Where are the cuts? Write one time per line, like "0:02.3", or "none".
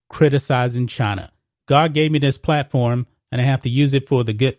0:01.5